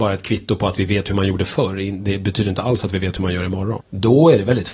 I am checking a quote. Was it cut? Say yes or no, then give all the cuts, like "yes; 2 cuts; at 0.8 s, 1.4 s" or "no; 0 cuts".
yes; 1 cut; at 3.8 s